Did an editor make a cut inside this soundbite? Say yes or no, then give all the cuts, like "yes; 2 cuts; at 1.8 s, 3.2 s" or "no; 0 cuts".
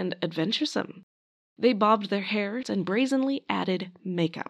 yes; 1 cut; at 2.6 s